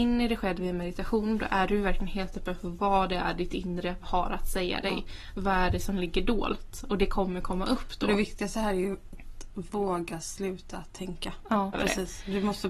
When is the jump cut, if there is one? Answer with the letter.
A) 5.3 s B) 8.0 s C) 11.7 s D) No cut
C